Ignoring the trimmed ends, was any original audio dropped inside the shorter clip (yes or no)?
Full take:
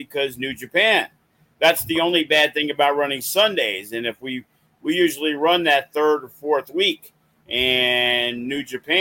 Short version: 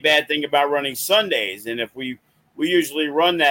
no